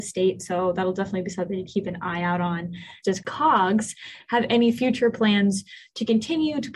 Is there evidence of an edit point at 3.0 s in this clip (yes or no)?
yes